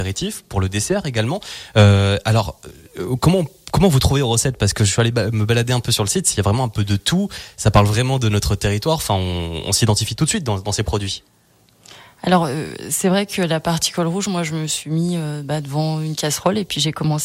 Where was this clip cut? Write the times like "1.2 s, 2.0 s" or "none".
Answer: none